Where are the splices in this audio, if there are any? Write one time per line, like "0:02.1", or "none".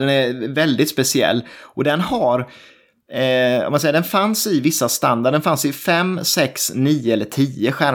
none